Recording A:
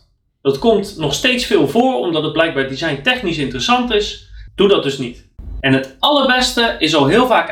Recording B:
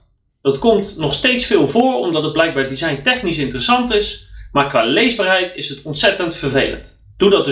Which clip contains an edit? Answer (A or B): A